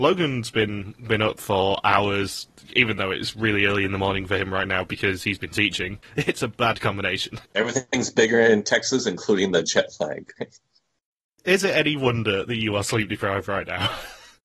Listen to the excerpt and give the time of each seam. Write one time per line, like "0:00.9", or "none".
0:06.0
0:07.5
0:10.4

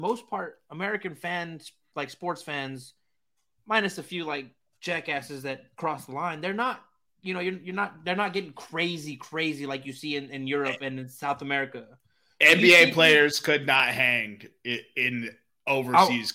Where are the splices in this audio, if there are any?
none

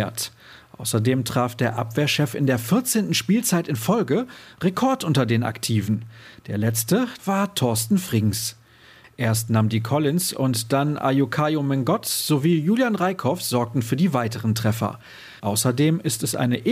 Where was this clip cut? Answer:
0:07.2
0:09.0
0:15.4

